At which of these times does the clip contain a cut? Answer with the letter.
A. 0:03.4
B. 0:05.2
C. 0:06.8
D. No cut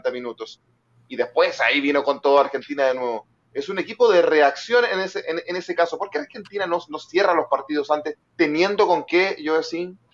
D